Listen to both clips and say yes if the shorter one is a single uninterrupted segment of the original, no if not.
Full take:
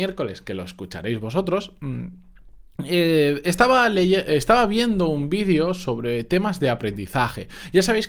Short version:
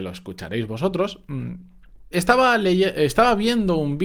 no